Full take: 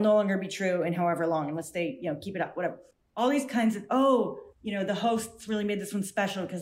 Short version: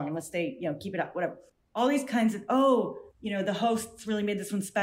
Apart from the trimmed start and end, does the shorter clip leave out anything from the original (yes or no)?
no